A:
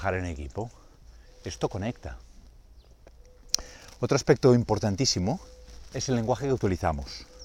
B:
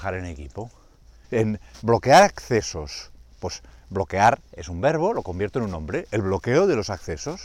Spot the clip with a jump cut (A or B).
B